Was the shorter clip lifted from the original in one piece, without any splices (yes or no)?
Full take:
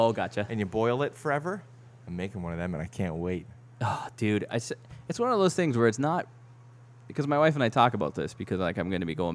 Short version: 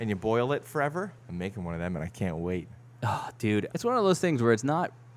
no